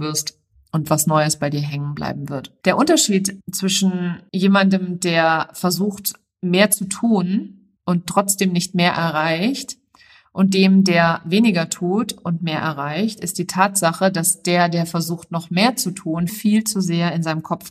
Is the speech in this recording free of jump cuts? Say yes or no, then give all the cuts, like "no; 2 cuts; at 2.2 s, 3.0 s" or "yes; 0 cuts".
no; 1 cut; at 16.3 s